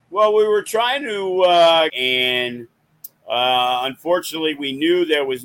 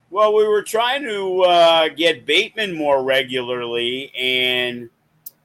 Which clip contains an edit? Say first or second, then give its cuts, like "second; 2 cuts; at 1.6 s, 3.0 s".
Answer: first; 1 cut; at 1.9 s